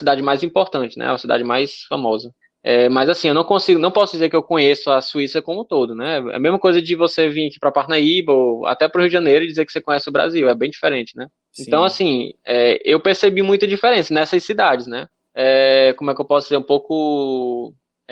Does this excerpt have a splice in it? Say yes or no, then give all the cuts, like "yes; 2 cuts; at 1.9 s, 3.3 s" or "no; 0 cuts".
yes; 1 cut; at 15.3 s